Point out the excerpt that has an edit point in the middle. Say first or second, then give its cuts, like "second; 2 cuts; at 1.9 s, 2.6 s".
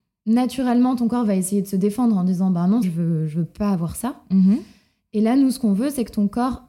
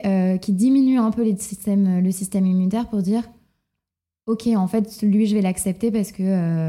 first; 1 cut; at 2.8 s